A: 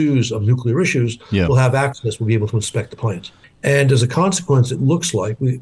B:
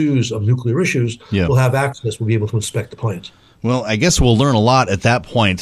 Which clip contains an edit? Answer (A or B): A